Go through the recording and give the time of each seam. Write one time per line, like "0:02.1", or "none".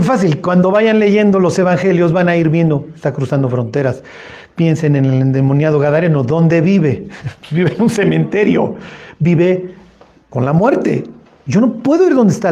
none